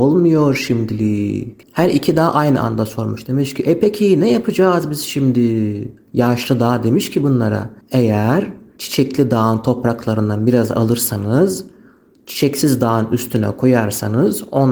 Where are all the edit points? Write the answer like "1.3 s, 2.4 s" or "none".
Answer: 1.6 s